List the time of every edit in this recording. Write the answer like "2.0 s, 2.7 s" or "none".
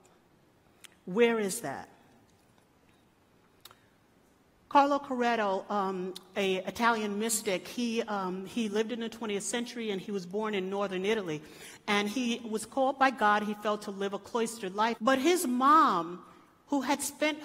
15.0 s